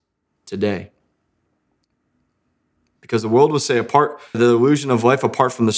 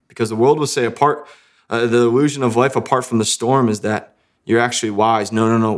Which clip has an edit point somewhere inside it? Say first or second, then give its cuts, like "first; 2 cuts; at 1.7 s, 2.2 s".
first; 1 cut; at 4.3 s